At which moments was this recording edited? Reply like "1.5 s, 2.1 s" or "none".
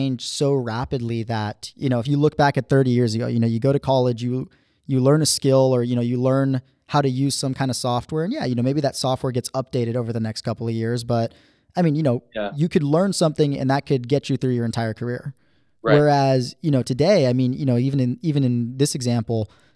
none